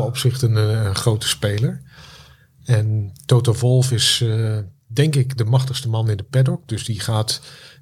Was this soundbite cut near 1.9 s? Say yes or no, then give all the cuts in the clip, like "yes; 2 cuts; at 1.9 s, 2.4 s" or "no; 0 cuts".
no; 0 cuts